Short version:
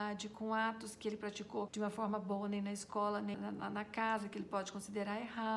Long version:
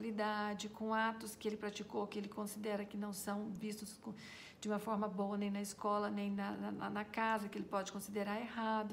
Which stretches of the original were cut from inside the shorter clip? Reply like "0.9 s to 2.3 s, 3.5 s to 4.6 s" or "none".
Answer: 2.1 s to 4.6 s, 6.2 s to 6.5 s